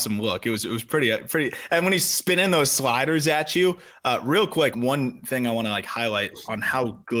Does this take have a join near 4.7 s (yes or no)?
yes